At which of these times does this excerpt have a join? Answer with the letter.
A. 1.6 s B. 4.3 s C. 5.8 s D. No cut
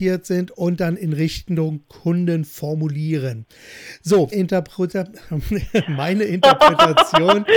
B